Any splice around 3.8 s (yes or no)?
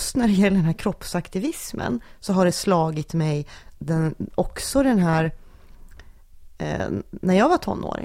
yes